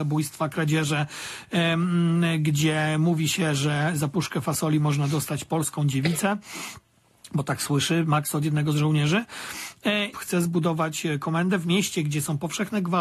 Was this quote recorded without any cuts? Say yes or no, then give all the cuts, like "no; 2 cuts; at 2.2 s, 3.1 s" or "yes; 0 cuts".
no; 1 cut; at 10.1 s